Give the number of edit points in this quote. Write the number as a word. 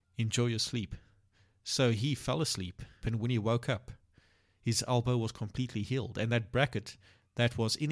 one